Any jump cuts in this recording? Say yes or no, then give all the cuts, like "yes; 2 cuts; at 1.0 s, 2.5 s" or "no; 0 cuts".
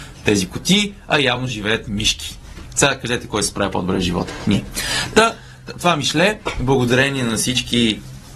no; 0 cuts